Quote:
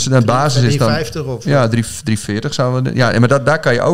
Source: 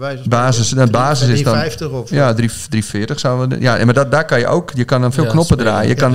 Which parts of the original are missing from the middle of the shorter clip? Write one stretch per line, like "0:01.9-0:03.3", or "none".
none